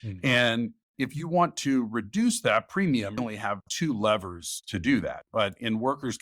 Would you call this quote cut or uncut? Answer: cut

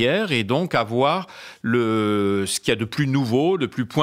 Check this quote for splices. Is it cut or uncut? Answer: uncut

